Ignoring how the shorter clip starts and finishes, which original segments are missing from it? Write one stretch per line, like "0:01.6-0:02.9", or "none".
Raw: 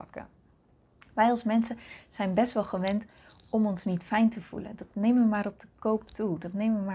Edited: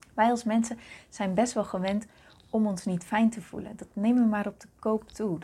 none

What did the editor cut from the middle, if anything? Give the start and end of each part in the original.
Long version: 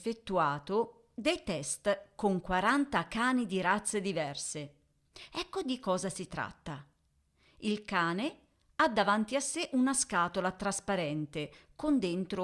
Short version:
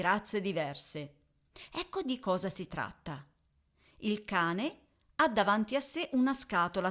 none

